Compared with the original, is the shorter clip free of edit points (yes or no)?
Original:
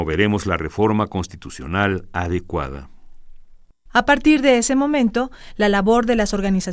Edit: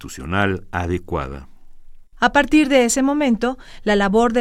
no